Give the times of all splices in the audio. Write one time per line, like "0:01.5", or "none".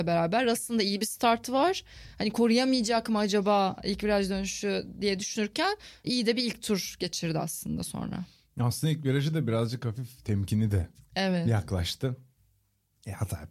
none